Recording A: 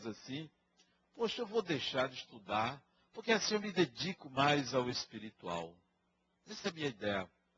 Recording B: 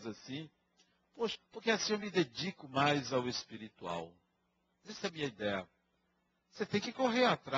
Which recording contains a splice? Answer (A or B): B